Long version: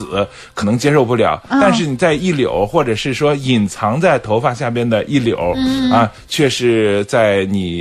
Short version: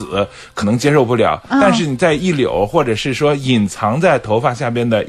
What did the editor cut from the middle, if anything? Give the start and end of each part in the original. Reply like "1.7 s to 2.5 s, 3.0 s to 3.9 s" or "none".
none